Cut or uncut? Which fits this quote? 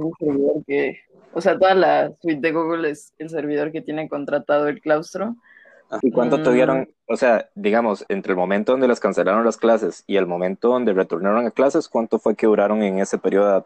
cut